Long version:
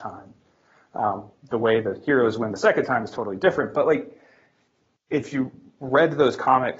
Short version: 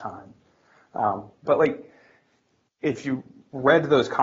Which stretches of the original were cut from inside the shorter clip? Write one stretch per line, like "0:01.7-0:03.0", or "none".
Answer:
0:01.5-0:03.7

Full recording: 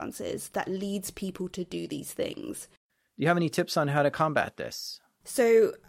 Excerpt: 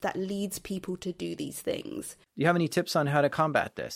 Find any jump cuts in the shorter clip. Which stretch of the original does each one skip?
0:02.8-0:03.1

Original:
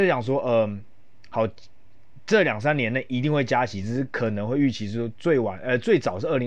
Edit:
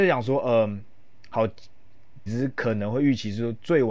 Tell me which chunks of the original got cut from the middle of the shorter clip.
0:02.3-0:03.8

